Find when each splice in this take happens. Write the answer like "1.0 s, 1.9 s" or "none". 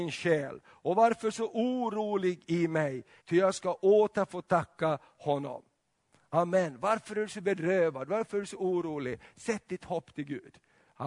3.2 s